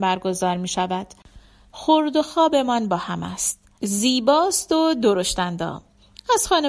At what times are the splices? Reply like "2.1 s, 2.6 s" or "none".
1.7 s, 3.8 s